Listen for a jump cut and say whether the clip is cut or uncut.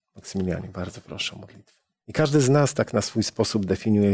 cut